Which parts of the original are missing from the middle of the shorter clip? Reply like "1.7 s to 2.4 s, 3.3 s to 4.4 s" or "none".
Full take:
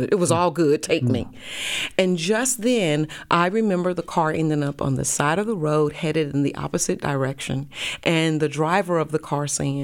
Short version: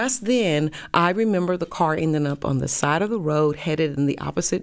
none